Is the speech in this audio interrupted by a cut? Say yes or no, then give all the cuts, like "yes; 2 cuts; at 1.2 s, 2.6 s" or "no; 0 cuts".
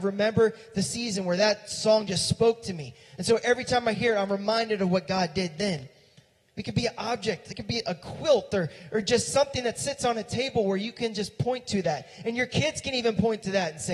no; 0 cuts